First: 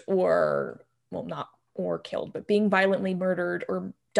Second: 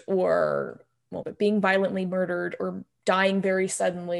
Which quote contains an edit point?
second; 1 cut; at 1.2 s

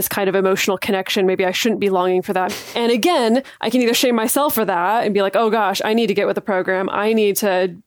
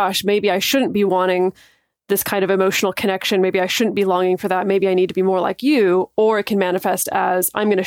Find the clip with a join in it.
first; 1 cut; at 2.5 s

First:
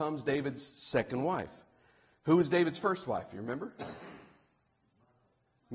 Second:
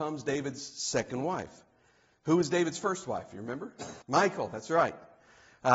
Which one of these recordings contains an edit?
second; 1 cut; at 4.0 s

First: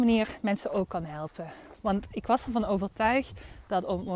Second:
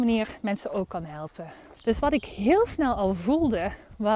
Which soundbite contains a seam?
second; 1 cut; at 1.8 s

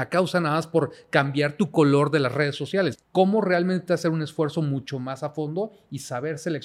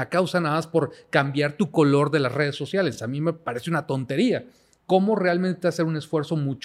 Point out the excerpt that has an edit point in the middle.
first; 1 cut; at 2.9 s

